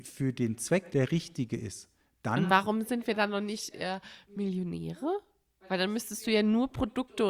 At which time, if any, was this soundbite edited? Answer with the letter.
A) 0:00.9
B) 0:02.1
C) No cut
A